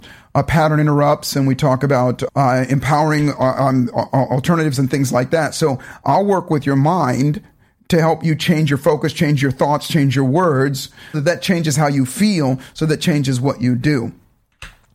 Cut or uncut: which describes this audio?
cut